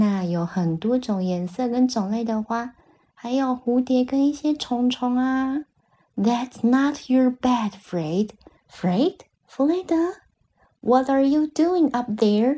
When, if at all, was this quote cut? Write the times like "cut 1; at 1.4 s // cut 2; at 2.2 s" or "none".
cut 1; at 8.6 s